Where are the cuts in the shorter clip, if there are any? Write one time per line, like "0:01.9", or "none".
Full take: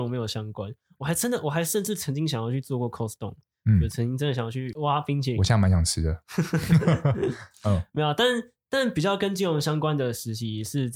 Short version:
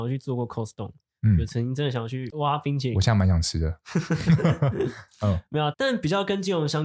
0:05.7